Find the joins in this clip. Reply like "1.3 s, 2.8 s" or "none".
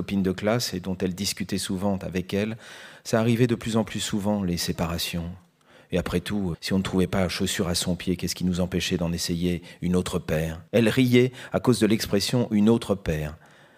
6.5 s, 10.7 s